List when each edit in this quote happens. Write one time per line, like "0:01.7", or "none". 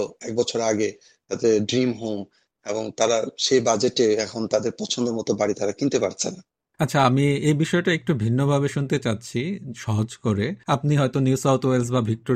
0:10.6